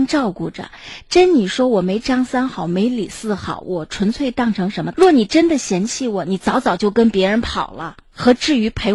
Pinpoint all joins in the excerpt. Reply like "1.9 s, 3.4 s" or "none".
4.9 s